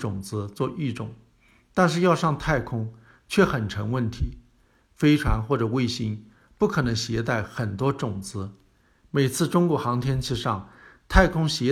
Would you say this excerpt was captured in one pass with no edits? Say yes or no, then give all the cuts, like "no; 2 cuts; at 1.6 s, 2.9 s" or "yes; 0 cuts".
yes; 0 cuts